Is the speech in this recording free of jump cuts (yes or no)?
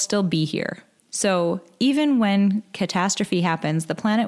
yes